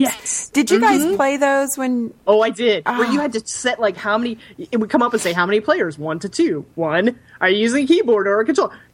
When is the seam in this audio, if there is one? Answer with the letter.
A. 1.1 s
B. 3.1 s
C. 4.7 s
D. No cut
D